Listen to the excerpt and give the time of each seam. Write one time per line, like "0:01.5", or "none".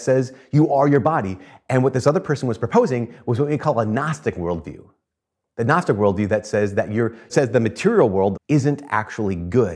0:07.3
0:08.3